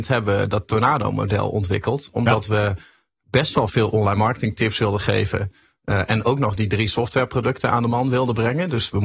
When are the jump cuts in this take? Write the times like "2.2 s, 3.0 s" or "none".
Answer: none